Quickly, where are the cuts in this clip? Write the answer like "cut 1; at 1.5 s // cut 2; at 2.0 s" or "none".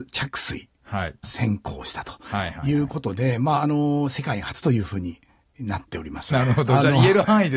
cut 1; at 6.3 s